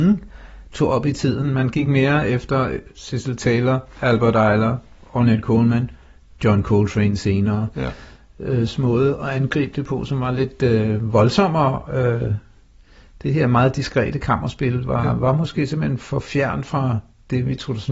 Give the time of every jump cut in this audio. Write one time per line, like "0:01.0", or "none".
none